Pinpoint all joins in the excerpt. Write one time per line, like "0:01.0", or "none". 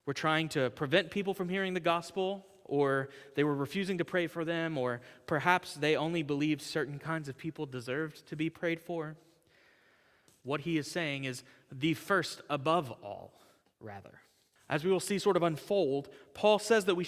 0:10.3
0:14.6